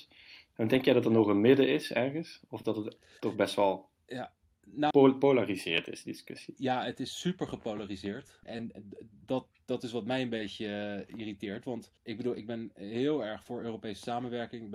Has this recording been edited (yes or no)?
yes